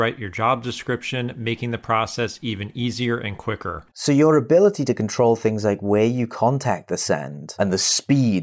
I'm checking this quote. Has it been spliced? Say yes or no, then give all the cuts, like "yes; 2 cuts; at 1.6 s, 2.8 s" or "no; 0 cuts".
yes; 1 cut; at 3.9 s